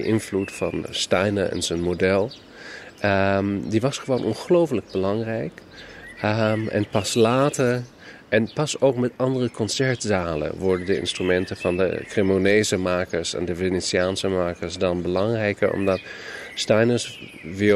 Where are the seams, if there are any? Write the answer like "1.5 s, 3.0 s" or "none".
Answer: none